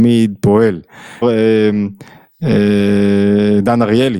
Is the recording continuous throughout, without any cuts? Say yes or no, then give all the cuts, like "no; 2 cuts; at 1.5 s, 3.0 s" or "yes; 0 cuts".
no; 1 cut; at 1.2 s